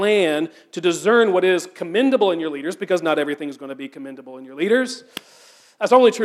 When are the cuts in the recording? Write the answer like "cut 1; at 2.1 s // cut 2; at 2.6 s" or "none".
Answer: none